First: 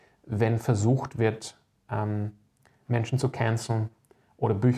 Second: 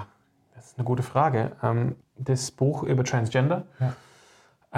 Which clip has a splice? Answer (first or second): second